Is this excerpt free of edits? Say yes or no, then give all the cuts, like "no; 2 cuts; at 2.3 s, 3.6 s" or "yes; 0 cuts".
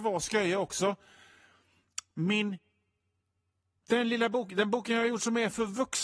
yes; 0 cuts